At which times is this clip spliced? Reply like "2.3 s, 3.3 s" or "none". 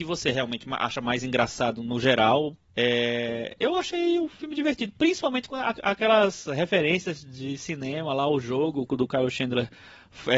2.7 s, 8.9 s